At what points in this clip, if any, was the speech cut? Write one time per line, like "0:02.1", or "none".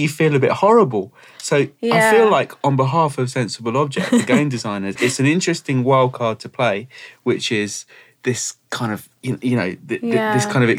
0:05.0